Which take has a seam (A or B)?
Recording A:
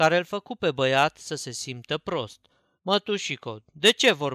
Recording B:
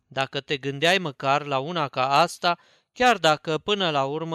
A